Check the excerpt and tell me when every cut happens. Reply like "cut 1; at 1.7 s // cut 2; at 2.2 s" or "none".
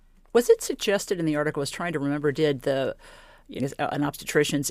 cut 1; at 3.6 s